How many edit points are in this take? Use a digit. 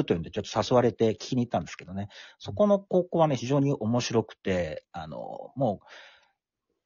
1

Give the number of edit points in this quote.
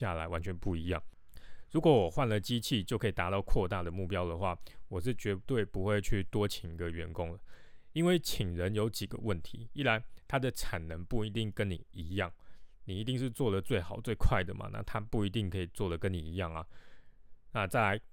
0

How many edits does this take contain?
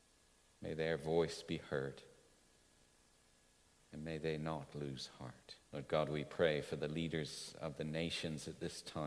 1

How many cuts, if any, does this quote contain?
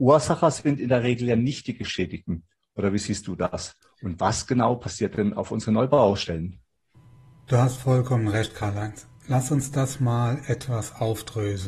0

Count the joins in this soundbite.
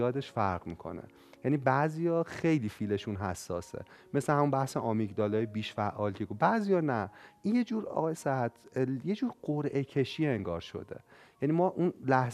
0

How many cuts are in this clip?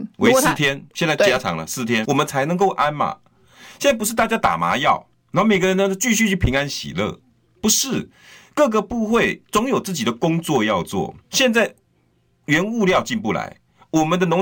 2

